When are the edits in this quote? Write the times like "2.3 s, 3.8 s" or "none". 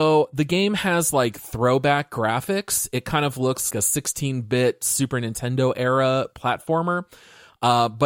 3.7 s

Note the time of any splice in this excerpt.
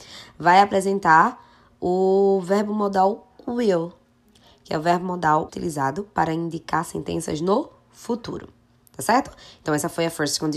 5.5 s

